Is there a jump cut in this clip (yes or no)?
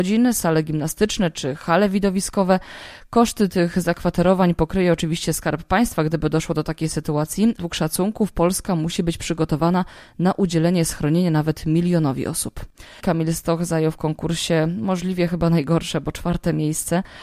yes